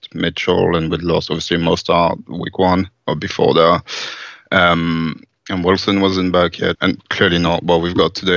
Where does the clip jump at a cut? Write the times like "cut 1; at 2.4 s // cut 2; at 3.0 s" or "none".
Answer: cut 1; at 6.7 s